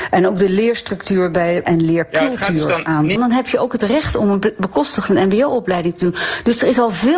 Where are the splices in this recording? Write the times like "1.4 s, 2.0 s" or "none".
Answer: 1.6 s, 3.2 s